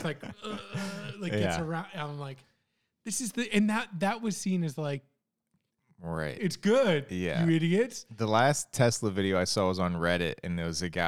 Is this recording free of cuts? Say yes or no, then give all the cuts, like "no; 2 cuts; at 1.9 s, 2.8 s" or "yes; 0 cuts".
yes; 0 cuts